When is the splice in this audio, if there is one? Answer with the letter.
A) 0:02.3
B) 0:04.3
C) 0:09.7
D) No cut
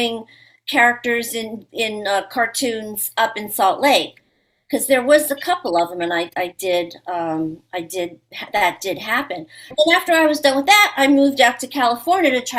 C